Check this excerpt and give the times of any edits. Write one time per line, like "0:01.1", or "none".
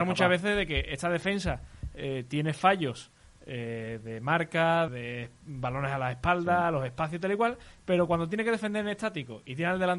0:04.9